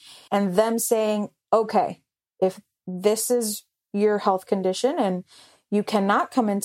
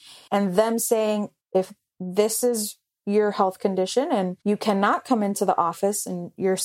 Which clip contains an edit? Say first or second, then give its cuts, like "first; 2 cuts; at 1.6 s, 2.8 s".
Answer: second; 2 cuts; at 1.4 s, 4.4 s